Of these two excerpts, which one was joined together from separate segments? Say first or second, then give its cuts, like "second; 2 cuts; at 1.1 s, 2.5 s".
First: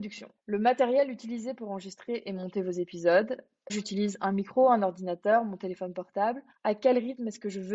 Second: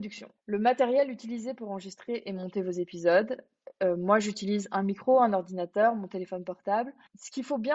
first; 2 cuts; at 3.7 s, 6.5 s